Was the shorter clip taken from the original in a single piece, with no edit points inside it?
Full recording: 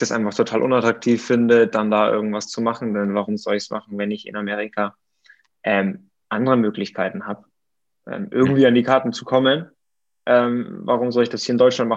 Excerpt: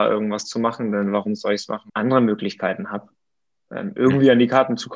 no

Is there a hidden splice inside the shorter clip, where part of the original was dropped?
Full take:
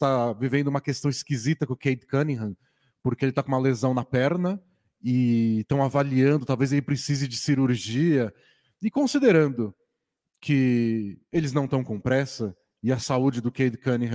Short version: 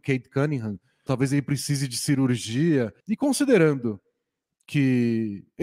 yes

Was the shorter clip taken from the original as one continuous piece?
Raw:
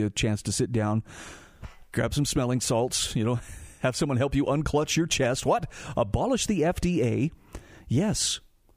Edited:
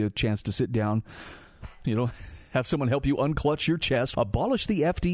no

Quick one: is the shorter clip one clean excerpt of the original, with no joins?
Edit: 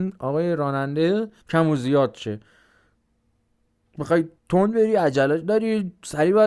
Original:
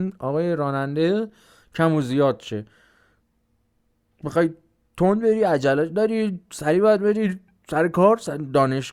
no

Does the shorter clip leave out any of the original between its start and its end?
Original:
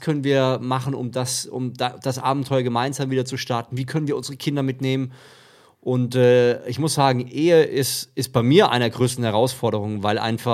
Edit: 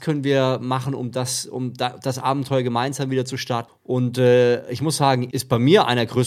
yes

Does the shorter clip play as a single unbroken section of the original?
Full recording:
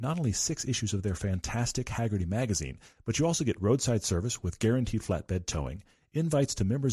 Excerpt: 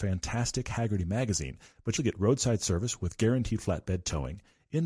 no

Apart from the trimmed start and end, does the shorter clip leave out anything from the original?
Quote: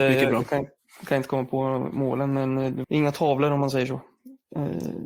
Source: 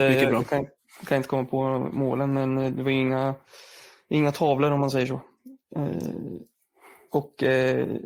yes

